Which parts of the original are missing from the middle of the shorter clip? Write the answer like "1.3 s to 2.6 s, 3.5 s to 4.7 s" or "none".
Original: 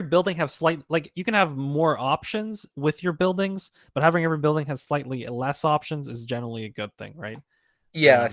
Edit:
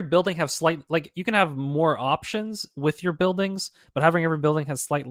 none